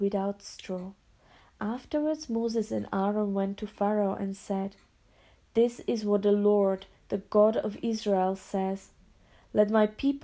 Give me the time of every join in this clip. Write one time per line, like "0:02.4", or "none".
none